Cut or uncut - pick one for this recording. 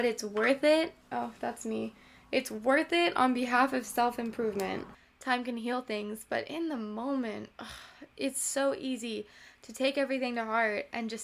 uncut